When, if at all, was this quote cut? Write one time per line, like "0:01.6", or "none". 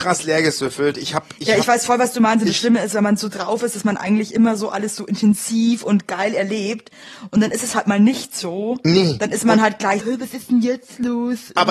0:10.0